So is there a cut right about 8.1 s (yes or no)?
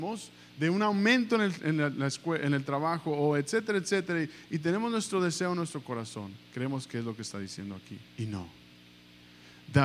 yes